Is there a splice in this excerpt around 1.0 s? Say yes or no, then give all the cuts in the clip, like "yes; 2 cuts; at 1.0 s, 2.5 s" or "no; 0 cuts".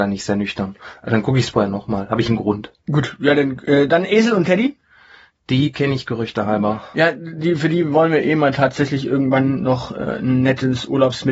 no; 0 cuts